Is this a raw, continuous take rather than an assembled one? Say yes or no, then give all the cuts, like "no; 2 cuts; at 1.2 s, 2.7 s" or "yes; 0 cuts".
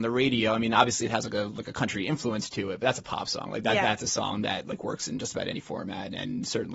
yes; 0 cuts